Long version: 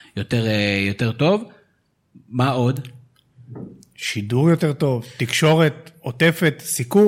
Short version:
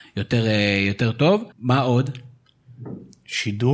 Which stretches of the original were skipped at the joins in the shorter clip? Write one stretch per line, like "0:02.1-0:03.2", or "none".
0:01.5-0:02.2

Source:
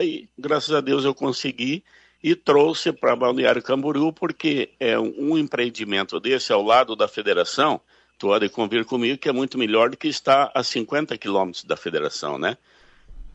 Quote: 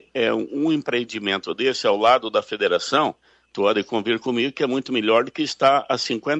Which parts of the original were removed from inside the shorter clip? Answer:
none

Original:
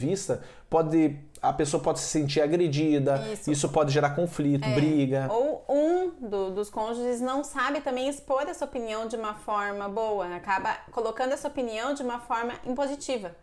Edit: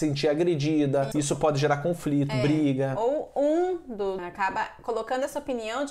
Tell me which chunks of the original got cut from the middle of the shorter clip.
0:03.2-0:03.4
0:06.5-0:10.3

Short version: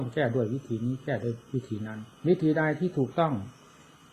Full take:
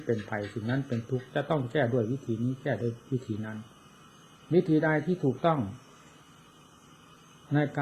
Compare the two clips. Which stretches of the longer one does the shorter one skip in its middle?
0:03.7-0:04.4

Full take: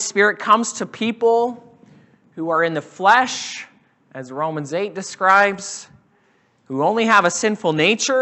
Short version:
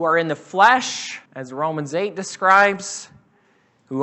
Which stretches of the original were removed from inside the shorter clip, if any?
0:03.7-0:04.0

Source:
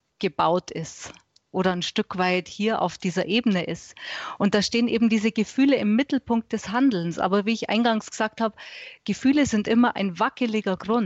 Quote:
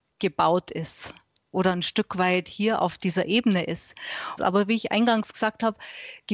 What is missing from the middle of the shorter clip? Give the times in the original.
0:04.4-0:07.1

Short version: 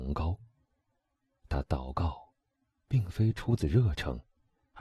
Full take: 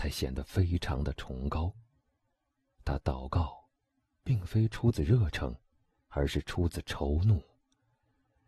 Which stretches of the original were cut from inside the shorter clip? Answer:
none

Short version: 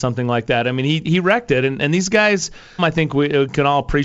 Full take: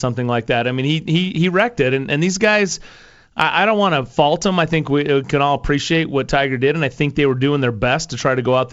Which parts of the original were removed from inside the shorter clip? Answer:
0:01.0-0:01.3
0:03.1-0:04.5

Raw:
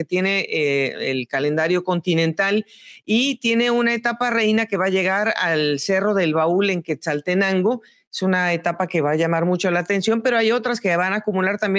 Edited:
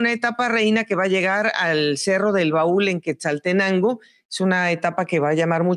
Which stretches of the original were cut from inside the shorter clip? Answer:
none

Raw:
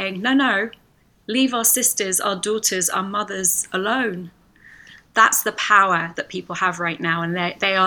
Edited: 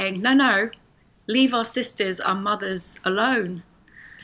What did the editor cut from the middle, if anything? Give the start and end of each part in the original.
0:02.2-0:02.9

